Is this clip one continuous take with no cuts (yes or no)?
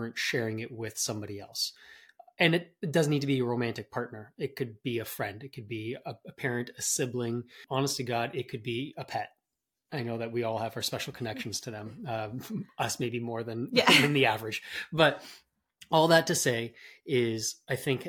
yes